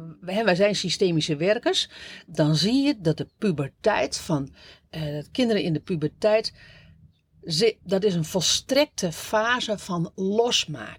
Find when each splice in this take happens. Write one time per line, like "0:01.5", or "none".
0:02.3